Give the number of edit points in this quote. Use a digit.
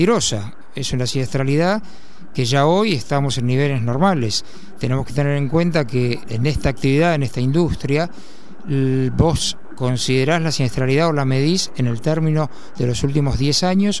1